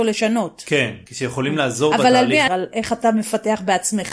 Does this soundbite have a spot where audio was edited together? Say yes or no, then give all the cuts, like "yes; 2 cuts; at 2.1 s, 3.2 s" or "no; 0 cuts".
yes; 1 cut; at 2.5 s